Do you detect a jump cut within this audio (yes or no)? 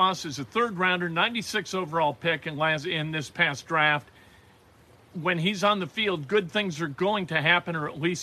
no